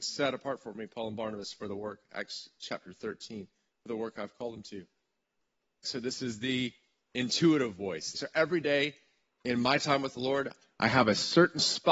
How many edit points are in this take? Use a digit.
2